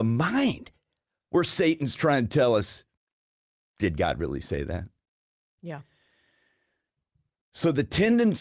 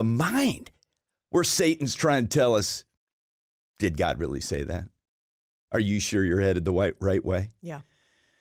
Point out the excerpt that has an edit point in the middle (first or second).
first